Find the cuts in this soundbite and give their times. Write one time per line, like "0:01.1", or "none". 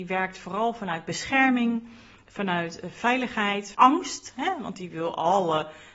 0:03.7